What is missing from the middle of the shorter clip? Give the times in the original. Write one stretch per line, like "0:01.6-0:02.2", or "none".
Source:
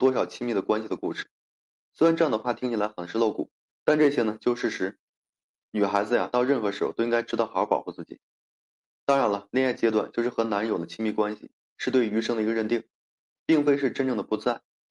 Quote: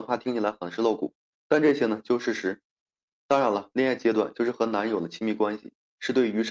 0:05.5-0:08.9